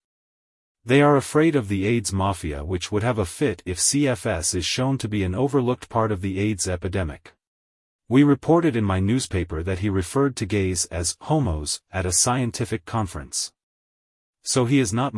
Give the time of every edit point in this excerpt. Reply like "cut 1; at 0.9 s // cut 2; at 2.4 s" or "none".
cut 1; at 7.9 s